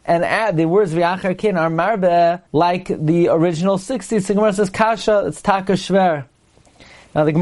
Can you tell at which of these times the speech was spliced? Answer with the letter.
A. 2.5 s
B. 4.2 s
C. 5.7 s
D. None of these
A